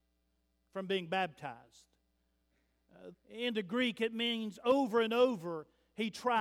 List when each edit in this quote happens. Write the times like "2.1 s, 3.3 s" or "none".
3.1 s